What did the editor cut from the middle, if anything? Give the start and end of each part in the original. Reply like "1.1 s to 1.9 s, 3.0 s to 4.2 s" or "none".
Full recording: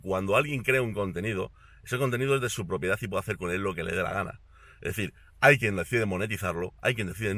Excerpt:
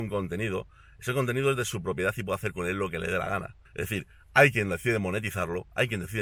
4.5 s to 4.7 s